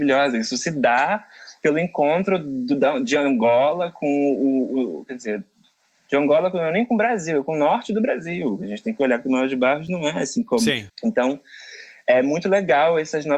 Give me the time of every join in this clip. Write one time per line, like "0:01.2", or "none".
0:10.9